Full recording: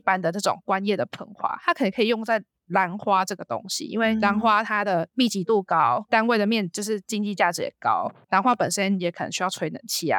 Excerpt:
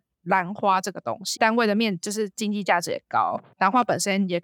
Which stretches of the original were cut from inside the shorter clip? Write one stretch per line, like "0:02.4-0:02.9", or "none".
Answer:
0:03.8-0:06.1